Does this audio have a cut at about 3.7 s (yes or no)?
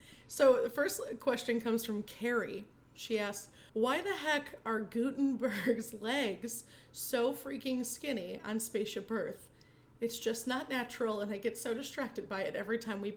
yes